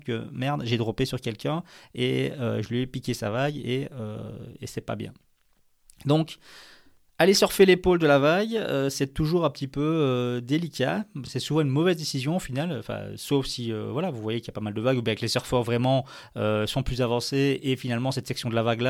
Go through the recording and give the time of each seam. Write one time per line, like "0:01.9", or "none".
none